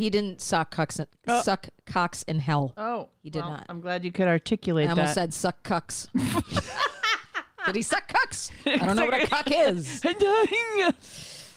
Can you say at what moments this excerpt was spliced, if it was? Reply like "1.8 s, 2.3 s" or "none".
none